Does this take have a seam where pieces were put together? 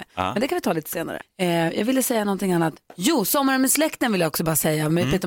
yes; 1 cut; at 1.2 s

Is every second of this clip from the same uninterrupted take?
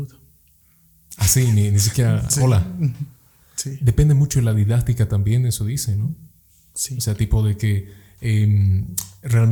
yes; 0 cuts

